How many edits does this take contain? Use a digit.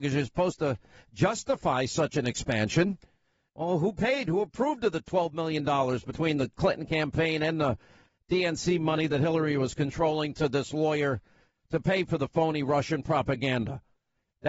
1